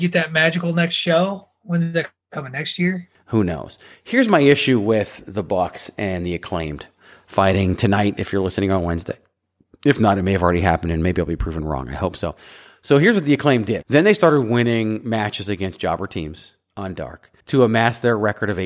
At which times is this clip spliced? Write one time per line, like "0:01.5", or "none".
0:03.1
0:13.8
0:17.4